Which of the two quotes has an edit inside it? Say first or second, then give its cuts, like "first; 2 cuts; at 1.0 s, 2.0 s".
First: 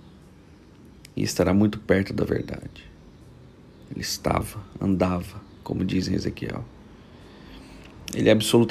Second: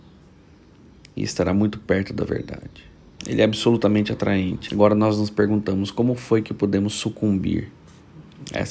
second; 2 cuts; at 3.2 s, 4.7 s